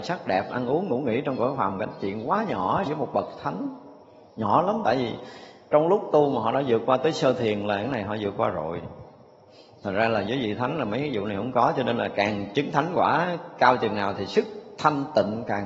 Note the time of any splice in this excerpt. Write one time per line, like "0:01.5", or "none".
0:02.9

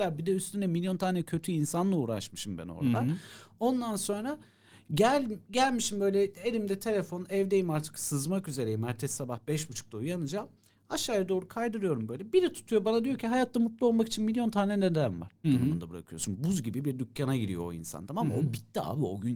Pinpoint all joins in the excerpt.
0:15.4

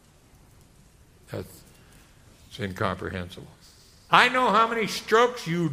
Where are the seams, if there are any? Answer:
0:04.1

